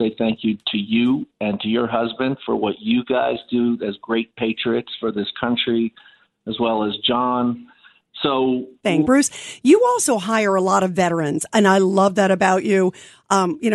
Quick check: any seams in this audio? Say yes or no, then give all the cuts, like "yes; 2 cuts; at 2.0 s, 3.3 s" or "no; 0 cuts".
yes; 1 cut; at 9.0 s